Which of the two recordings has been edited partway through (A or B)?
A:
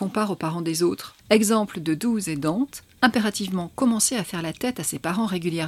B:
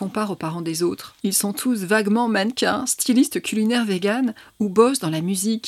A